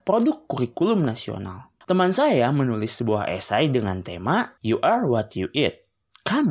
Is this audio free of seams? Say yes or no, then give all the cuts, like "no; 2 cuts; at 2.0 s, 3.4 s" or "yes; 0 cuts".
no; 2 cuts; at 1.8 s, 4.6 s